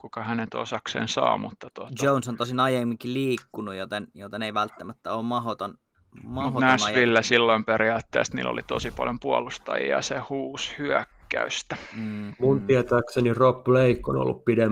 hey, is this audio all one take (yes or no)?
yes